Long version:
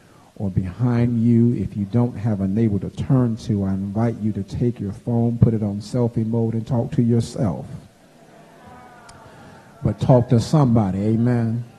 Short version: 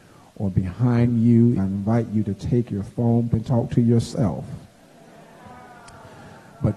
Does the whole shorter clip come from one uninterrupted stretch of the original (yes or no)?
no